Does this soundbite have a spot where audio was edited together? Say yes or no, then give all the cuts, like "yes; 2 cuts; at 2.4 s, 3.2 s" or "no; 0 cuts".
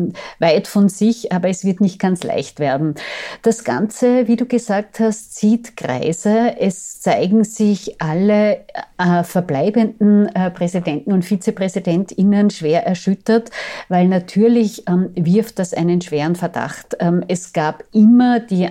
no; 0 cuts